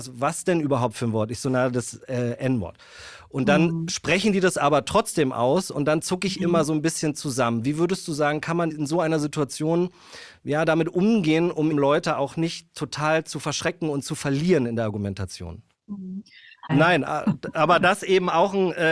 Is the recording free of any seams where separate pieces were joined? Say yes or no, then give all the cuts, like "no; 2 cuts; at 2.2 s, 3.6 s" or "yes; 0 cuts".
no; 2 cuts; at 11.7 s, 16.7 s